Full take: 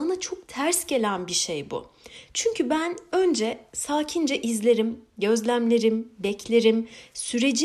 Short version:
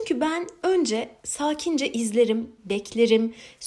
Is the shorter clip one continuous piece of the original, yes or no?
no